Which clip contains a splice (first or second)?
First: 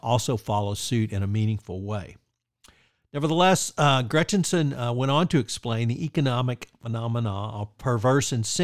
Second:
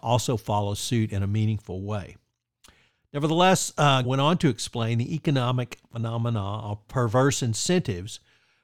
second